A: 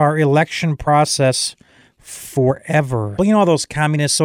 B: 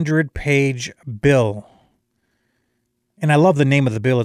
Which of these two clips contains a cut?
A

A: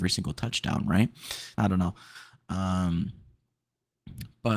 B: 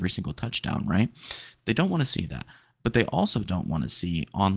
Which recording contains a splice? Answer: A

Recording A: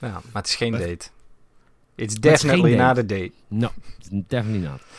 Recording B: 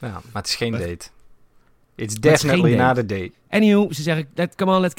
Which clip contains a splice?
B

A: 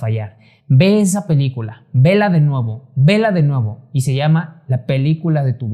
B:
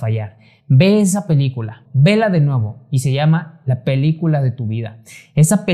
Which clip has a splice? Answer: B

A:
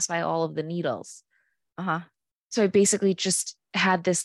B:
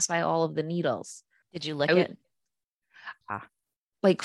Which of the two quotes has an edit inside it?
B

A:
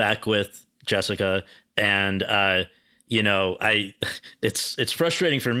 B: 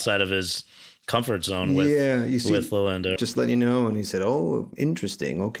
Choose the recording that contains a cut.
B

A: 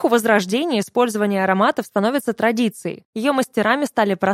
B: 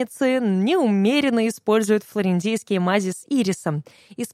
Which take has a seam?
A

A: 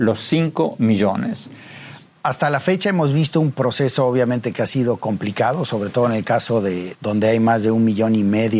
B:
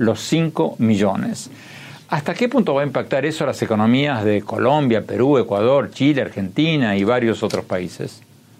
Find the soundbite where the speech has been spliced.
A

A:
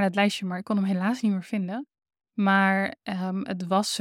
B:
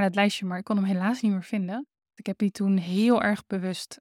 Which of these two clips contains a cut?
B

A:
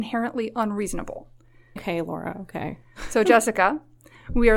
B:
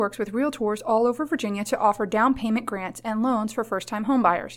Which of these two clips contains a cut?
A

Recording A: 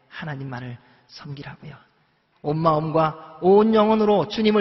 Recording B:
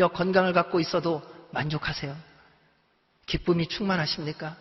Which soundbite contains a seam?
A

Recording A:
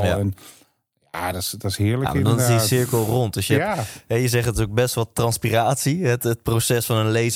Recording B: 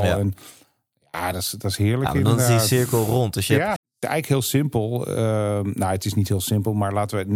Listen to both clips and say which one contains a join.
B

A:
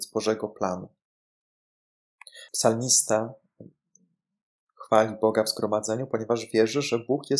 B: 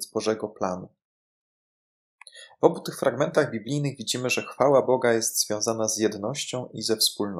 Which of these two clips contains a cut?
A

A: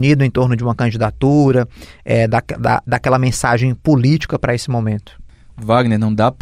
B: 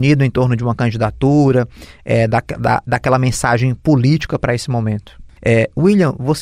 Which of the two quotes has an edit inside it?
B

